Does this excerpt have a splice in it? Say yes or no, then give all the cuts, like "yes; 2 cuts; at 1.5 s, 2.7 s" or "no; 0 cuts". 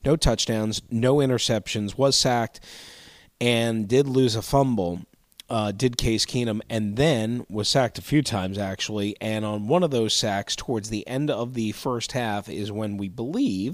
no; 0 cuts